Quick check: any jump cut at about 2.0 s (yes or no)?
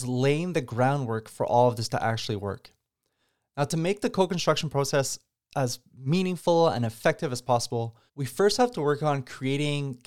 no